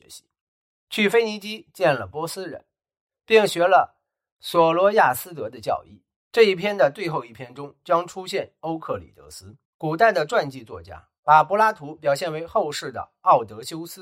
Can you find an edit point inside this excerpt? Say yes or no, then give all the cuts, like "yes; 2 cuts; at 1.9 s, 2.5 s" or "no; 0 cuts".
yes; 2 cuts; at 6.2 s, 9.6 s